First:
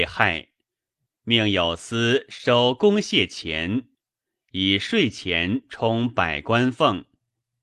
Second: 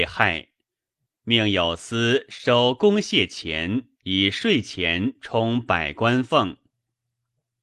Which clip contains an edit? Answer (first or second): second